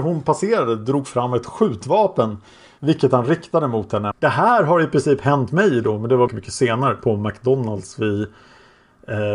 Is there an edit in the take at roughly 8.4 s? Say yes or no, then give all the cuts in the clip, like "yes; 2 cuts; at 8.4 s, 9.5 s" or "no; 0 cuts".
no; 3 cuts; at 2.8 s, 4.1 s, 6.3 s